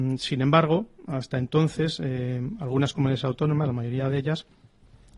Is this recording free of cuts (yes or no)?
yes